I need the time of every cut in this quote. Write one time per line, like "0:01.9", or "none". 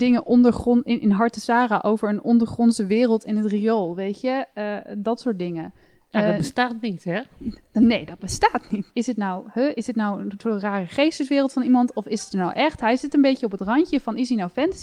0:08.9